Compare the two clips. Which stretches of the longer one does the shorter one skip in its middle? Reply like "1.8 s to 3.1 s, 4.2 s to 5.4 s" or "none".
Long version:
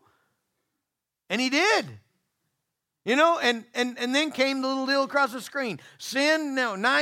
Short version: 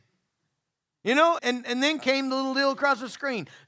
3.4 s to 3.7 s